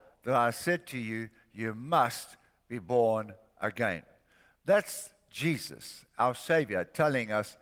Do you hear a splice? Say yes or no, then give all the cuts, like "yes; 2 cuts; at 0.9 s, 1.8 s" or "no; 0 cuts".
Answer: no; 0 cuts